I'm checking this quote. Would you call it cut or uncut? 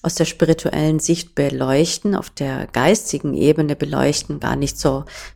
uncut